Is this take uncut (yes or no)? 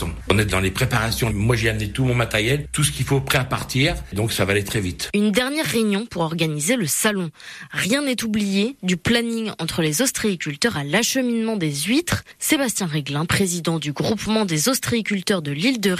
yes